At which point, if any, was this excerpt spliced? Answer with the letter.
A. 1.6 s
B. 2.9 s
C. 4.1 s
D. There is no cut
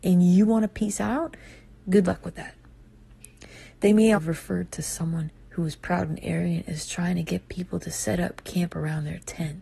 C